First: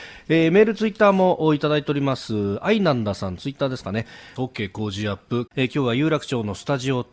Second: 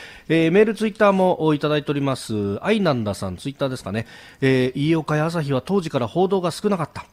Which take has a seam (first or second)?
first